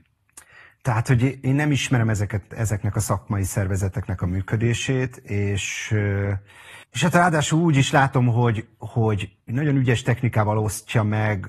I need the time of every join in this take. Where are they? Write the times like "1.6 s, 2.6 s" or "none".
6.8 s, 9.4 s